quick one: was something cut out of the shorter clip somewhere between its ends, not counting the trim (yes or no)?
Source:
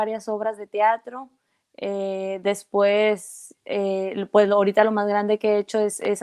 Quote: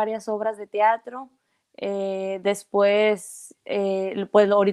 no